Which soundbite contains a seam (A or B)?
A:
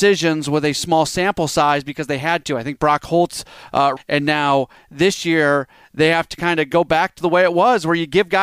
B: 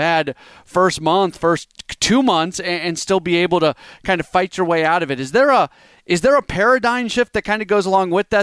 A